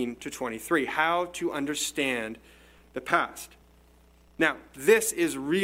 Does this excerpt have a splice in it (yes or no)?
no